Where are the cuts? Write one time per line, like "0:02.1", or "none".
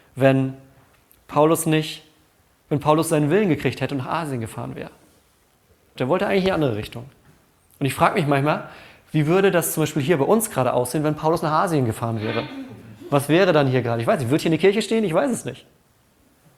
0:06.0